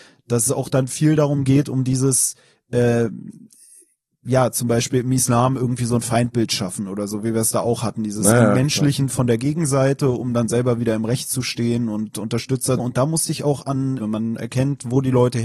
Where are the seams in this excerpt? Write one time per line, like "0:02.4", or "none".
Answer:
0:12.8
0:14.0